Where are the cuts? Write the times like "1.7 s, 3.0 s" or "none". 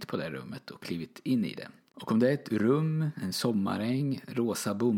1.9 s